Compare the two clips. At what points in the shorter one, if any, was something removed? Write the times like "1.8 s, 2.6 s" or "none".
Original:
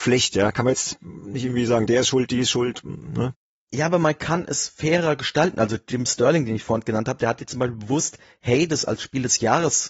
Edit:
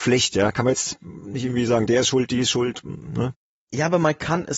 none